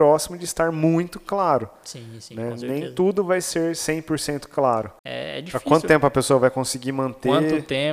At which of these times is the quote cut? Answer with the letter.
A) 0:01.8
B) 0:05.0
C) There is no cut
B